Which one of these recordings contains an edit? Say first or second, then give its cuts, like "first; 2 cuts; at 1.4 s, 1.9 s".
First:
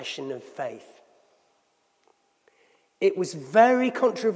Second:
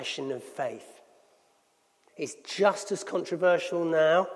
second; 1 cut; at 2.1 s